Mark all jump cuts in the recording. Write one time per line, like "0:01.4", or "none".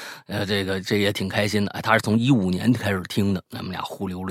none